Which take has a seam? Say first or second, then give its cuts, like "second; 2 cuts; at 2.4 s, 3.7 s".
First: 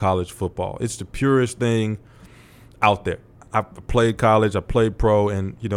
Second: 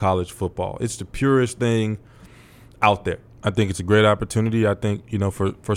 second; 1 cut; at 3.3 s